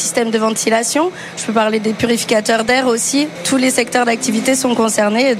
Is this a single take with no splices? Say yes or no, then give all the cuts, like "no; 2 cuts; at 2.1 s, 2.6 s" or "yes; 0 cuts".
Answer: no; 1 cut; at 3.4 s